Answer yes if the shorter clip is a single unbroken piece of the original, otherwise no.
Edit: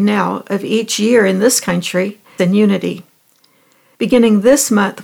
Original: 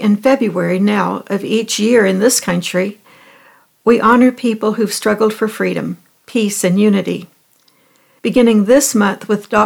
no